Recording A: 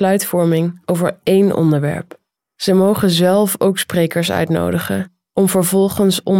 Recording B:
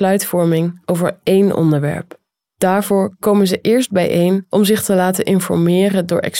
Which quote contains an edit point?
A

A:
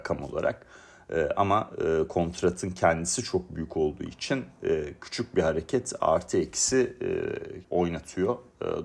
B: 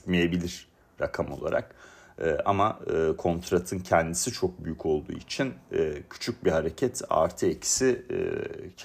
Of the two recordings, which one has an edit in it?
A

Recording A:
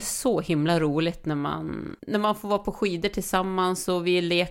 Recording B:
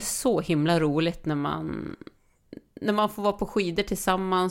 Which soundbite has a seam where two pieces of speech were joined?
A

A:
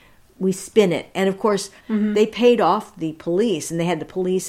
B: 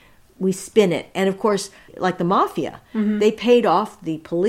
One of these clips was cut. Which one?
A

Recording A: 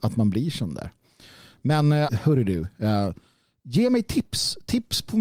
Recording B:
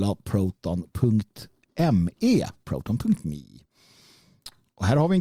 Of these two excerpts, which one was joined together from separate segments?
A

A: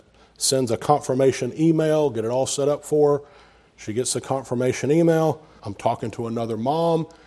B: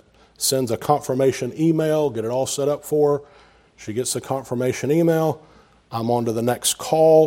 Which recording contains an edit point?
A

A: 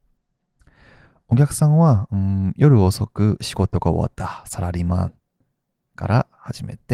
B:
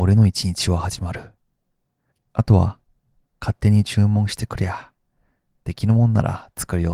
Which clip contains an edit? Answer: B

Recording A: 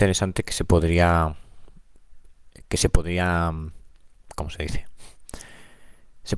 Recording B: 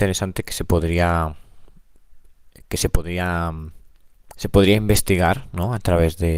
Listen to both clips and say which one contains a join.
B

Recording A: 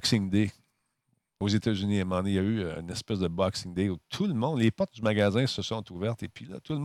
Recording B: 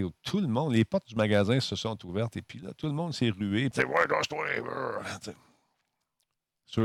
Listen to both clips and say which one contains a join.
B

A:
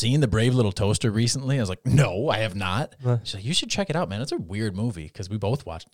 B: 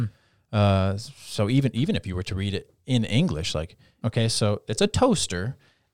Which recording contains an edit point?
B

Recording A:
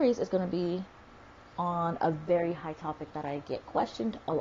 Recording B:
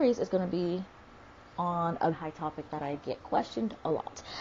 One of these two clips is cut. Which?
B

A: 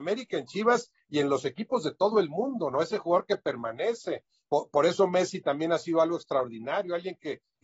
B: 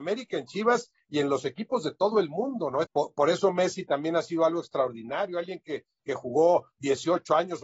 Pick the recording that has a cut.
B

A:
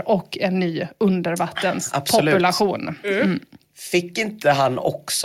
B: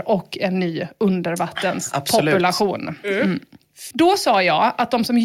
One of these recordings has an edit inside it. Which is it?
B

